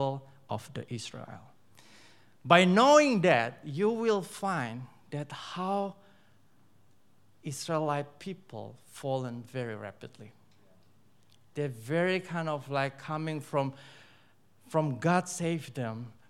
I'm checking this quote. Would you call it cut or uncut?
uncut